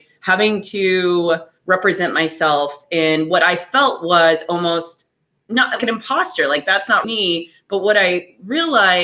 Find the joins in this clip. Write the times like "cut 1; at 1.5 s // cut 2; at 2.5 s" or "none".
cut 1; at 5.8 s // cut 2; at 7.0 s